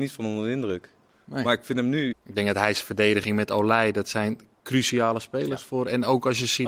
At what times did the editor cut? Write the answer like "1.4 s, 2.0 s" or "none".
2.1 s